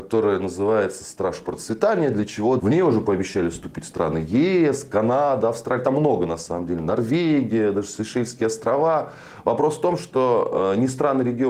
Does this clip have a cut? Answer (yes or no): yes